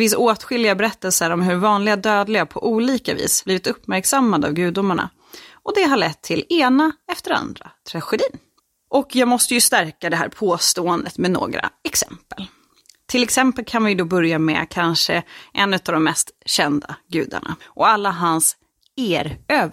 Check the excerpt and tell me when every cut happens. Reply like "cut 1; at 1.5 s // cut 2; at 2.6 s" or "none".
cut 1; at 17.6 s